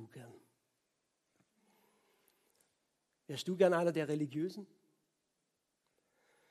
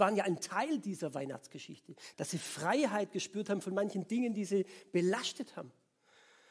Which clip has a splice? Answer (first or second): second